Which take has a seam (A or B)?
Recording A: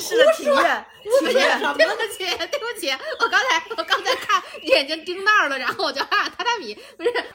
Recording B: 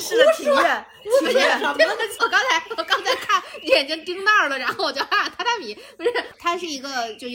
B